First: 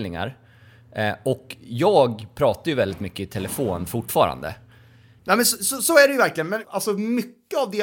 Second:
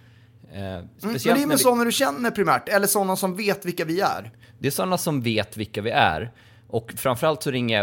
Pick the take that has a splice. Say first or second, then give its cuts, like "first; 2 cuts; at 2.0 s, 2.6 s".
first; 2 cuts; at 5.2 s, 6.6 s